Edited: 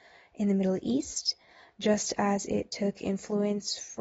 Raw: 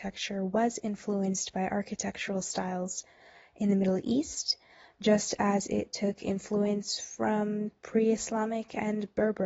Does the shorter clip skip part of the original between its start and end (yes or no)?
no